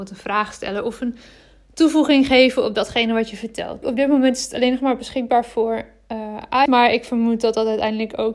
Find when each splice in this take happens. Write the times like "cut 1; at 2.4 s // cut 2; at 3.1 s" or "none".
cut 1; at 3.8 s // cut 2; at 6.7 s